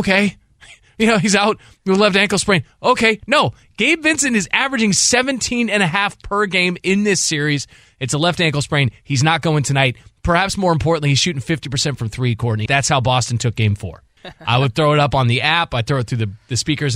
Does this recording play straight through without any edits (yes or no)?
no